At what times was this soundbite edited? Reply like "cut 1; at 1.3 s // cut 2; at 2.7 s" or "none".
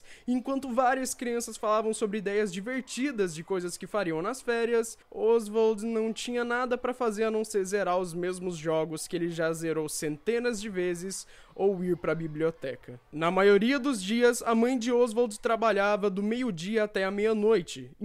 cut 1; at 5.0 s